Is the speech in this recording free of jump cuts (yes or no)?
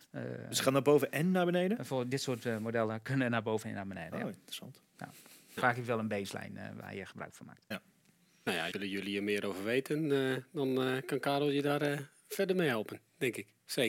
no